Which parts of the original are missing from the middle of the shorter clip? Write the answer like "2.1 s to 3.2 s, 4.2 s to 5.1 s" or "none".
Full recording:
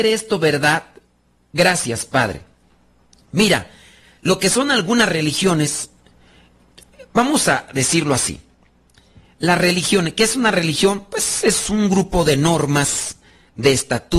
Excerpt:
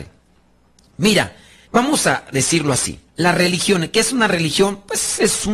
4.0 s to 7.1 s, 8.5 s to 9.3 s